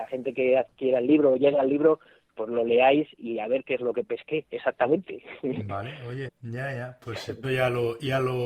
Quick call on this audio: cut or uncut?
cut